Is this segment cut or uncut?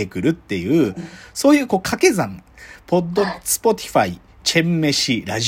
cut